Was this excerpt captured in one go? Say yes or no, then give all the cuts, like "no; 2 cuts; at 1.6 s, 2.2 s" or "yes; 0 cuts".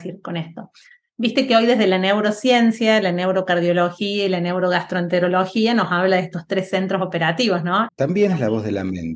no; 1 cut; at 7.9 s